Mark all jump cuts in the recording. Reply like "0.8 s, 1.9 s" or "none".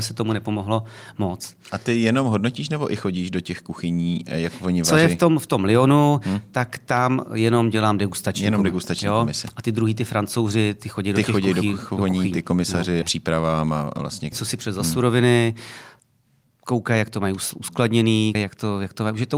13.0 s, 14.3 s, 18.4 s